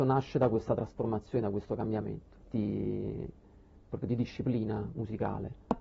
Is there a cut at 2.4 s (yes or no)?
yes